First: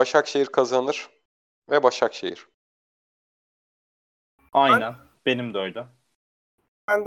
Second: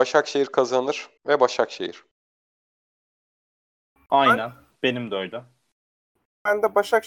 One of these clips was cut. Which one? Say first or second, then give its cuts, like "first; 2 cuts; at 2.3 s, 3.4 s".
second; 1 cut; at 1.2 s